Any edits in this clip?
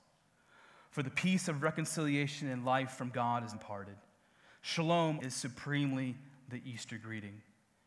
yes; 2 cuts; at 3.5 s, 5.2 s

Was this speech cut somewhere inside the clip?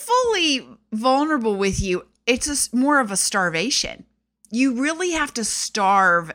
no; 0 cuts

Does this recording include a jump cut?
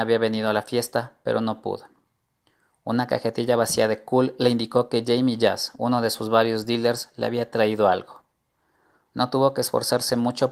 no; 0 cuts

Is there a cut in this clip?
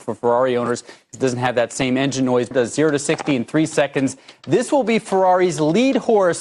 yes; 1 cut; at 2.5 s

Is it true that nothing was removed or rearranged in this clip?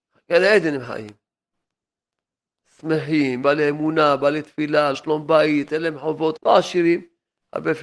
no; 3 cuts; at 3.4 s, 4.9 s, 6.4 s

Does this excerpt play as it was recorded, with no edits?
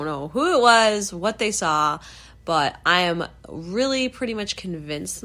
yes; 0 cuts

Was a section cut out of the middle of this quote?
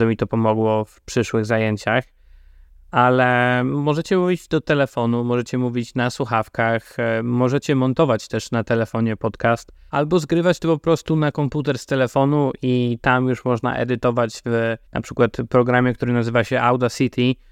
yes; 2 cuts; at 9.9 s, 14.9 s

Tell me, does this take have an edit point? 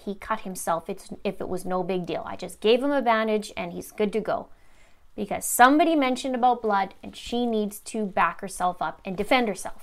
no; 0 cuts

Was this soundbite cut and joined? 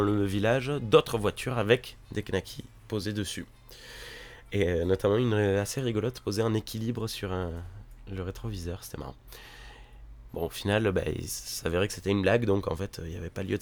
yes; 1 cut; at 10.3 s

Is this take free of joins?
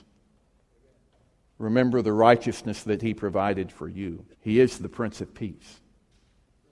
no; 2 cuts; at 1.5 s, 4.3 s

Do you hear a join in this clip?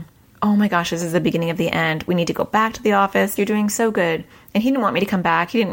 yes; 1 cut; at 3.4 s

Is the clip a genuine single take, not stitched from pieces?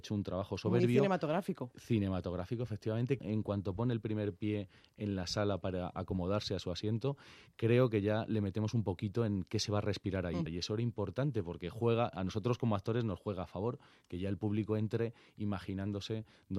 no; 2 cuts; at 3.2 s, 10.5 s

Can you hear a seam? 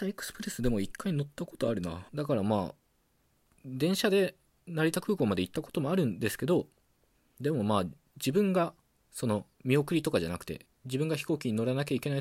yes; 1 cut; at 2.1 s

